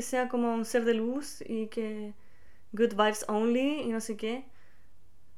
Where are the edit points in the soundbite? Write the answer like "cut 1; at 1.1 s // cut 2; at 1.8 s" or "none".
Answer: none